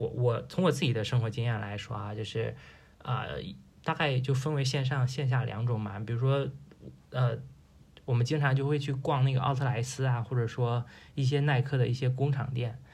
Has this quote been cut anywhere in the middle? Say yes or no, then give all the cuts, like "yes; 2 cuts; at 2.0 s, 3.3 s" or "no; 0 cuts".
no; 0 cuts